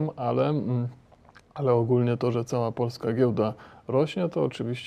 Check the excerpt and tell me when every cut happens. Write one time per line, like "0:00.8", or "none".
none